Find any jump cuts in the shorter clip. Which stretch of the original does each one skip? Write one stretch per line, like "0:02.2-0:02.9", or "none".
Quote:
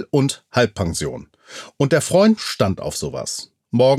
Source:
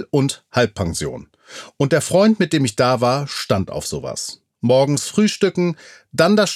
0:02.4-0:03.3